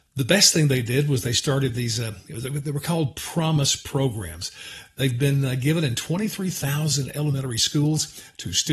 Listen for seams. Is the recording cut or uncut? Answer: uncut